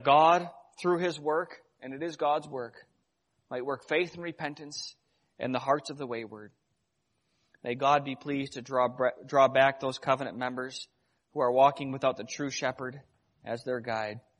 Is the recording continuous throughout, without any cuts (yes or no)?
yes